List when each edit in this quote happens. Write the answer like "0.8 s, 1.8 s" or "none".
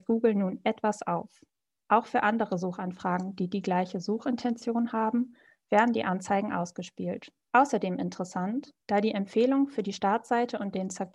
7.5 s, 8.8 s